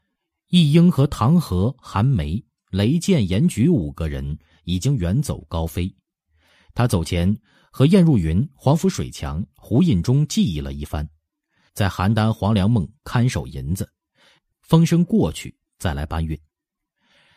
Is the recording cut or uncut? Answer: cut